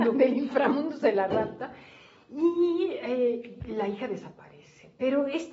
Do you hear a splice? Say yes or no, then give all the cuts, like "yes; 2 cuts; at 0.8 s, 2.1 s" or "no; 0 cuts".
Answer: no; 0 cuts